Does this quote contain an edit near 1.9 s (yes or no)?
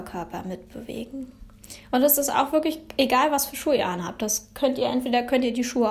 no